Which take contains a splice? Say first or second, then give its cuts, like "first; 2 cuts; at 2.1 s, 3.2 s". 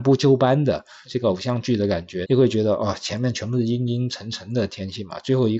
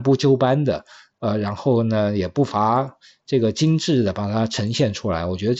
first; 2 cuts; at 1.0 s, 2.2 s